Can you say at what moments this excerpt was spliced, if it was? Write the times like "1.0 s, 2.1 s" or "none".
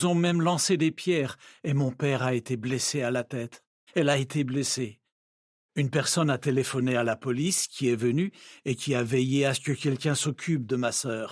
3.9 s